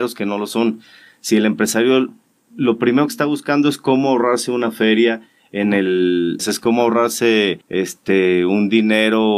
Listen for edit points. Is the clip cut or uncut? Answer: cut